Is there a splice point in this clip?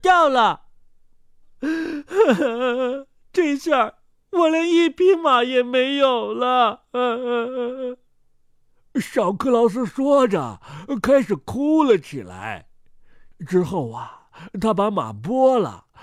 no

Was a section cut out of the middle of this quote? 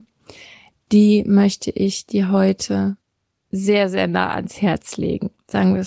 no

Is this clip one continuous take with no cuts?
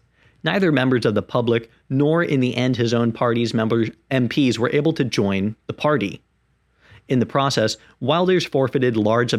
yes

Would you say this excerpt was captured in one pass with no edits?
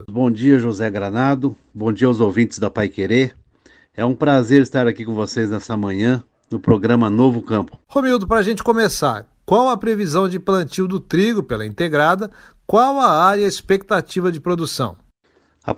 yes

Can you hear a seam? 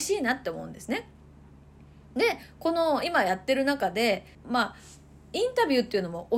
yes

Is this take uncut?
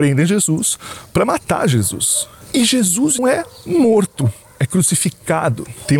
no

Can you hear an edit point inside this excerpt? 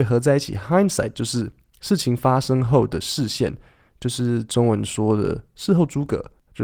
no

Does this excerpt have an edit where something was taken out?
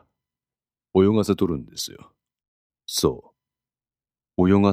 yes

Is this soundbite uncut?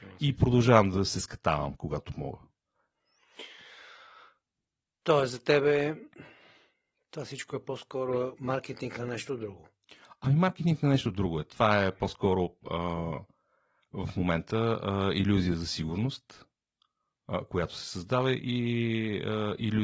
yes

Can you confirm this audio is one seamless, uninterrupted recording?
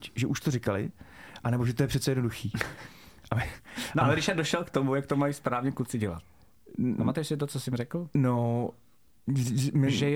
yes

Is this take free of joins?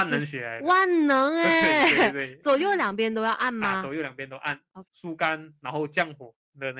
no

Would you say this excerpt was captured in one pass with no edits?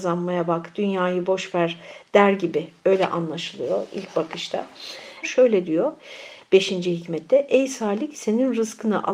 no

